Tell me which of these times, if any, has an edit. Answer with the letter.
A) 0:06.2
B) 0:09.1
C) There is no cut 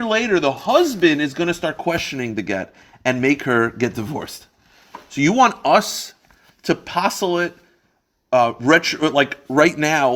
C